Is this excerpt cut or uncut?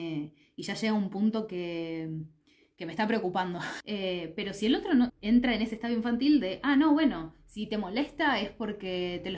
cut